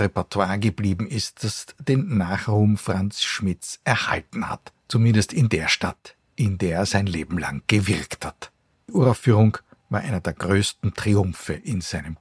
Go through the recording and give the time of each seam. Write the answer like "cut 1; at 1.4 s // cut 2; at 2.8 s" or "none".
cut 1; at 8.7 s